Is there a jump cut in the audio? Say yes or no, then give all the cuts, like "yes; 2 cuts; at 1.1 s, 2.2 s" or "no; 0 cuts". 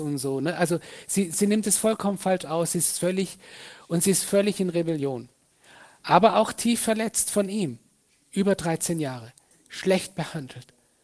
yes; 1 cut; at 8.3 s